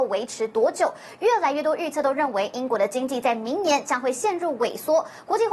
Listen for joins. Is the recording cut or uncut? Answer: uncut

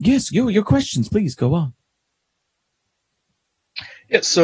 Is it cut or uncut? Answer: cut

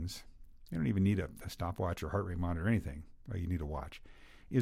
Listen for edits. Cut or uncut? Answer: uncut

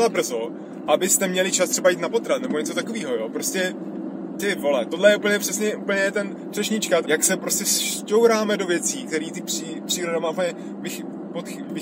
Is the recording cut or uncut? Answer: cut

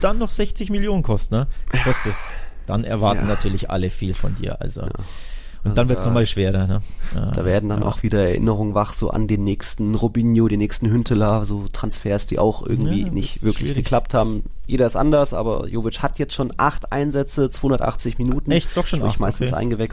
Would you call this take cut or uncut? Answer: uncut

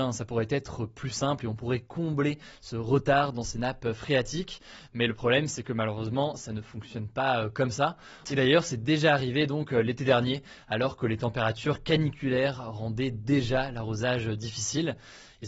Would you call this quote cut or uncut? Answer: cut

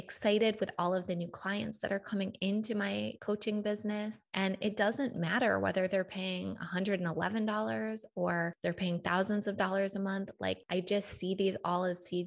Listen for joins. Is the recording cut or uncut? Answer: uncut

